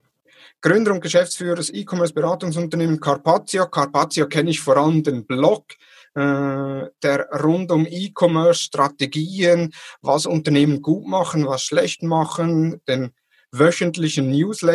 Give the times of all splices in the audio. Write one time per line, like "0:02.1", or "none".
none